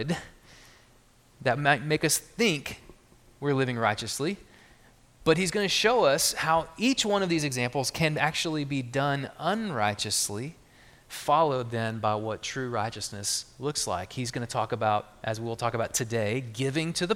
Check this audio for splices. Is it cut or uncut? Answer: uncut